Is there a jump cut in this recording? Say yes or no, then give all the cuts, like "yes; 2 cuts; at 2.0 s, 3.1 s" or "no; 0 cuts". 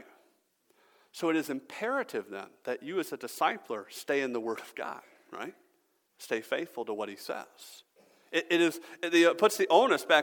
no; 0 cuts